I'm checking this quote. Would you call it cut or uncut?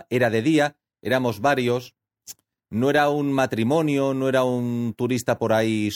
cut